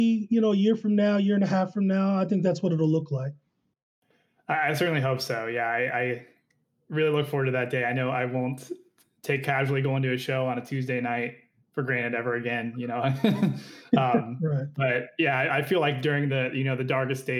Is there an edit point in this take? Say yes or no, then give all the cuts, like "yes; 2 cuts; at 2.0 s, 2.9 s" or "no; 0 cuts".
no; 0 cuts